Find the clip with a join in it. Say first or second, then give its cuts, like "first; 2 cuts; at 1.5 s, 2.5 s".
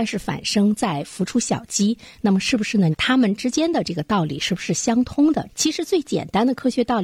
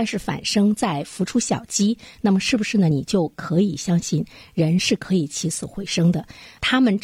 first; 2 cuts; at 2.9 s, 5.5 s